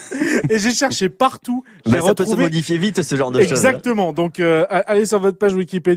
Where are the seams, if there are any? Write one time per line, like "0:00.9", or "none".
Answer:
none